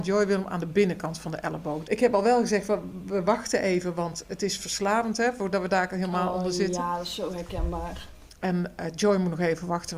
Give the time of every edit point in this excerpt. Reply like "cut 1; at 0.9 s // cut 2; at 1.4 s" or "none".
cut 1; at 1.8 s // cut 2; at 8.3 s